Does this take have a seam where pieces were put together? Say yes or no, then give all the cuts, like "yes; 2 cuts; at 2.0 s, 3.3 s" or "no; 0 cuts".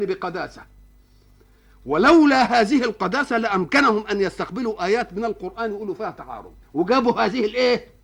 yes; 1 cut; at 6.6 s